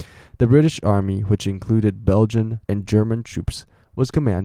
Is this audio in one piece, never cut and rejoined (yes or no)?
no